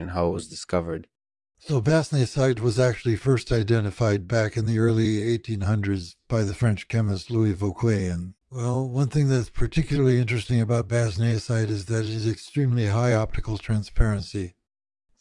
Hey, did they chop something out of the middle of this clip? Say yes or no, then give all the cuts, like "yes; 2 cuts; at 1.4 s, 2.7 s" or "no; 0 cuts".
yes; 1 cut; at 8.3 s